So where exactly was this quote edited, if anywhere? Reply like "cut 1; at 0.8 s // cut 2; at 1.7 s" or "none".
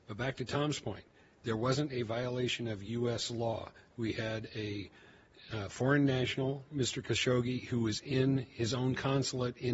none